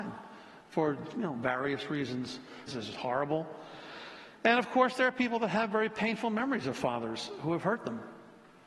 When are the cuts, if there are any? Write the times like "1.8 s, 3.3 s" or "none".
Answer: 2.7 s